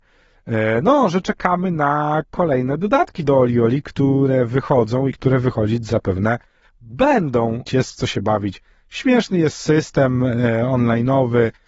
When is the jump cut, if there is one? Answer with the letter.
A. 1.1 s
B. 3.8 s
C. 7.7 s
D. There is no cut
C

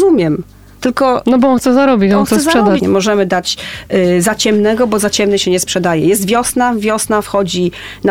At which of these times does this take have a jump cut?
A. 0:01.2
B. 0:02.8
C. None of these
B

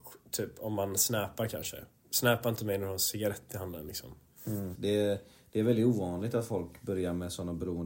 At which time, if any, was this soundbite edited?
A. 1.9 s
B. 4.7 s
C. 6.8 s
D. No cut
B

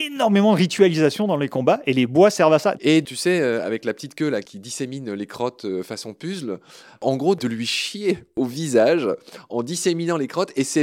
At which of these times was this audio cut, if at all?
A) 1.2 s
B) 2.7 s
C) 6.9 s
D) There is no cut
B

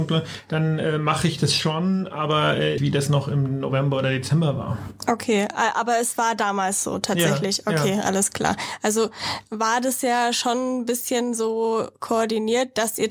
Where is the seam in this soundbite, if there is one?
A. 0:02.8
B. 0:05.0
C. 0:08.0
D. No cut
A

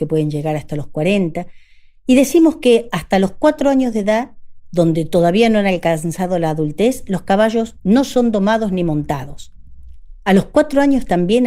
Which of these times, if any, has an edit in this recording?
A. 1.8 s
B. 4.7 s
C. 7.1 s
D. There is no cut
D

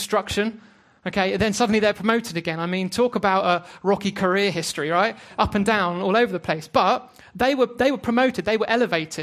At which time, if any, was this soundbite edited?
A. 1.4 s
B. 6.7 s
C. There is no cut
C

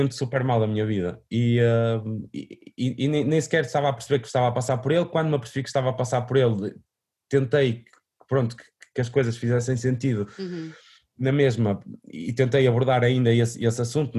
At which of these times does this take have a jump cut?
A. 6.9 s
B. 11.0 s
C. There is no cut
C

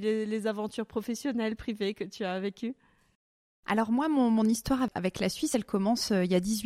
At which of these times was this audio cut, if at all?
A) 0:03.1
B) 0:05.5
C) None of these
C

